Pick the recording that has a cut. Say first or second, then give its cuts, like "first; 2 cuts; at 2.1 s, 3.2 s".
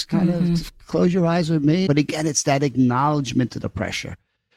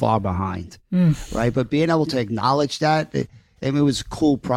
first; 1 cut; at 1.9 s